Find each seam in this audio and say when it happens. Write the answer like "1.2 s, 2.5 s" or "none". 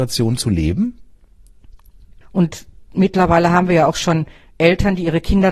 2.2 s